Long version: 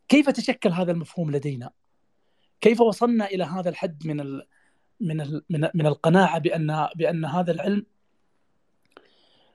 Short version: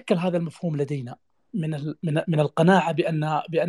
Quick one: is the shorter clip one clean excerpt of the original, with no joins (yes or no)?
no